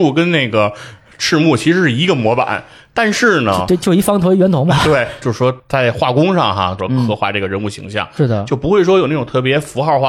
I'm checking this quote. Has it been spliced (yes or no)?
yes